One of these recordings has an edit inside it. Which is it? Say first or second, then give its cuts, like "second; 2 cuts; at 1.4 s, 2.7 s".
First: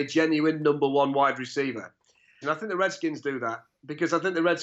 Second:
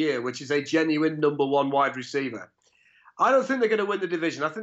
first; 1 cut; at 2.4 s